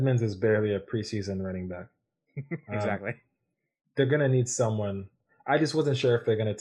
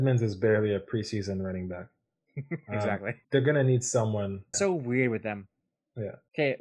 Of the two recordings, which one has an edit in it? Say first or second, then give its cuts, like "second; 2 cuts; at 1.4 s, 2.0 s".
second; 2 cuts; at 3.2 s, 4.5 s